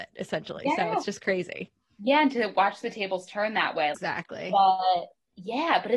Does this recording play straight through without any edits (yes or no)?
no